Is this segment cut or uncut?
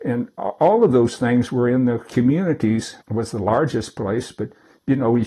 cut